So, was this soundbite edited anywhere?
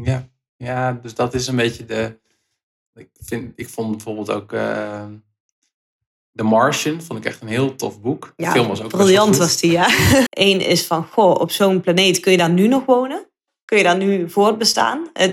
yes; 1 cut; at 10.3 s

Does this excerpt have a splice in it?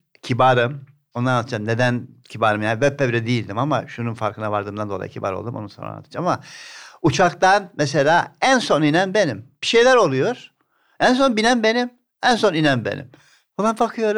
no; 0 cuts

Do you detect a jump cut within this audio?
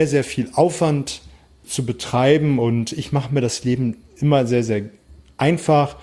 yes; 1 cut; at 1.6 s

